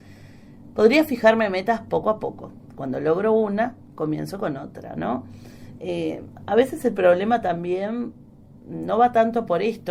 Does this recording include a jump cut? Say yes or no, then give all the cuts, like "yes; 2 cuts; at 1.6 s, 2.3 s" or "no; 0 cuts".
yes; 1 cut; at 5.8 s